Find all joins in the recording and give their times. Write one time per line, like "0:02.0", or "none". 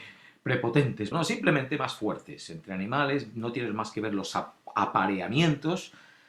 0:01.1